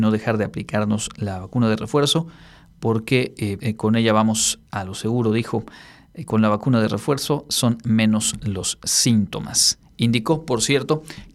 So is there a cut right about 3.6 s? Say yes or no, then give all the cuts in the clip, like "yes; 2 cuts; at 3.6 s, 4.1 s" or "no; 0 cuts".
yes; 1 cut; at 3.6 s